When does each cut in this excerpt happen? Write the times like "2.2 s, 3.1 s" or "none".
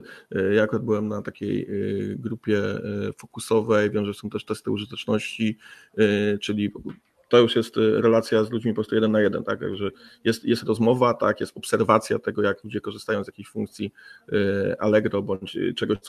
none